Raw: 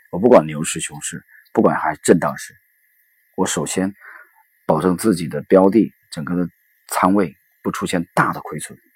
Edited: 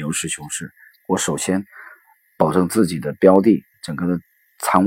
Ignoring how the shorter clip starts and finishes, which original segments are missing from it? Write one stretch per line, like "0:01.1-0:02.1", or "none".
0:01.5-0:03.2